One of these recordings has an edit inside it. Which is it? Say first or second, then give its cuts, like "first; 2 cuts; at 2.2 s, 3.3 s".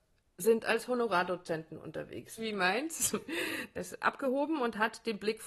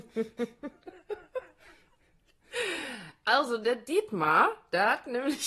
first; 2 cuts; at 2.4 s, 3.7 s